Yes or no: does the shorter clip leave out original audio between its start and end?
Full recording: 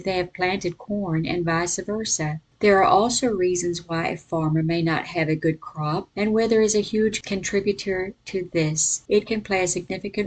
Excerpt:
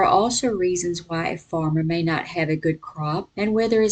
no